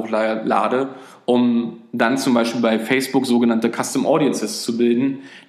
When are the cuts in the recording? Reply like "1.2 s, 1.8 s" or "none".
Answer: none